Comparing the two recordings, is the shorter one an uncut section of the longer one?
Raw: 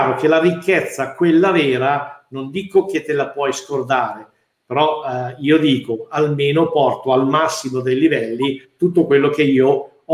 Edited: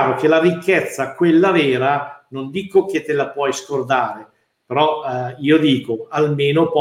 yes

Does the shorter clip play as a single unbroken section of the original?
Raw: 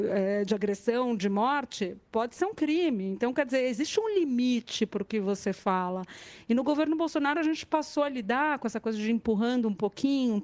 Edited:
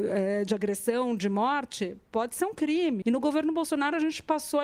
no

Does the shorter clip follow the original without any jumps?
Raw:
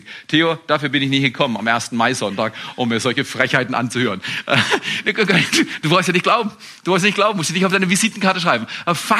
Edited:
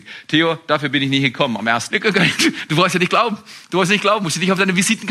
no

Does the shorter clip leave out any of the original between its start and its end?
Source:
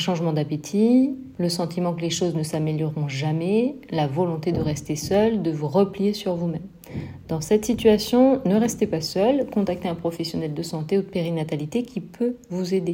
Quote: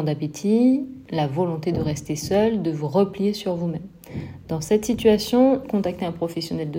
yes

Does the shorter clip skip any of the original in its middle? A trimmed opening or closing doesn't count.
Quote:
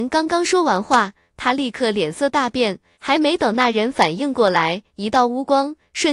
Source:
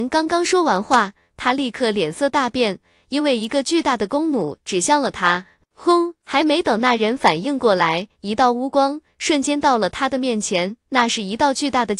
yes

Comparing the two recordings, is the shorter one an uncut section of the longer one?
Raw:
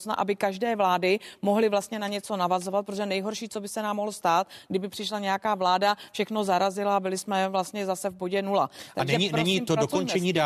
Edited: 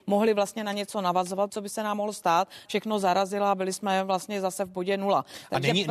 no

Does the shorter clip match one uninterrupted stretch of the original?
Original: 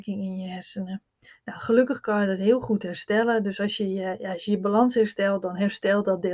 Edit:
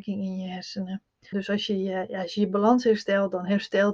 no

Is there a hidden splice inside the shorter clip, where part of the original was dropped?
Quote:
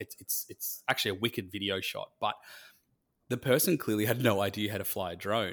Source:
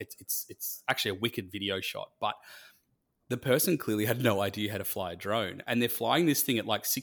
no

